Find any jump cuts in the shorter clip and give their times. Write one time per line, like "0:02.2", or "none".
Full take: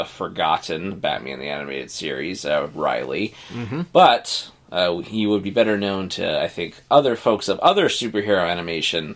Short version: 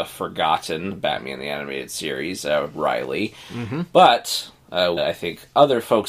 0:05.0